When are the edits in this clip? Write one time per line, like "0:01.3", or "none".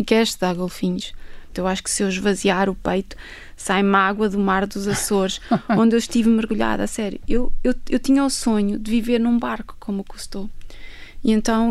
0:01.5